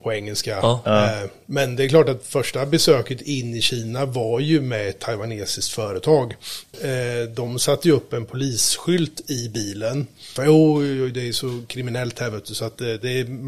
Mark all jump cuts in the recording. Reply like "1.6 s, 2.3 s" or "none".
10.4 s